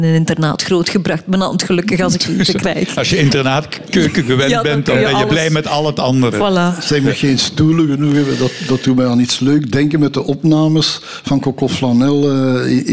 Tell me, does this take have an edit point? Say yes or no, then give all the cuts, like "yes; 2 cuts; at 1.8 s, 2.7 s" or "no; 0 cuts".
no; 0 cuts